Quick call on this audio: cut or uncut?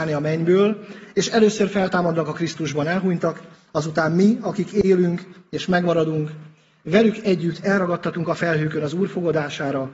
uncut